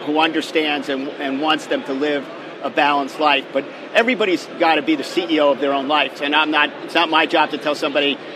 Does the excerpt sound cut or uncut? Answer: cut